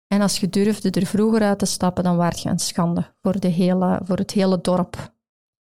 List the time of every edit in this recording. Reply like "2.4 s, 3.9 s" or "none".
none